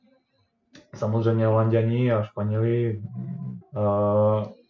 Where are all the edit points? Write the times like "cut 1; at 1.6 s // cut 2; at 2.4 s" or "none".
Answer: cut 1; at 3.6 s